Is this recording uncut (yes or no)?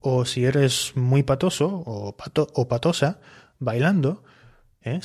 yes